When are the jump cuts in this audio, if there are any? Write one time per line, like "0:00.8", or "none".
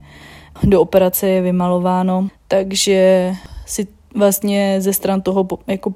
0:02.3